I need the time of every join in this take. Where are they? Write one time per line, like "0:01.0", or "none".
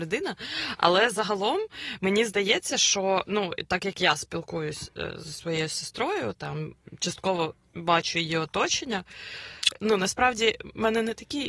0:09.7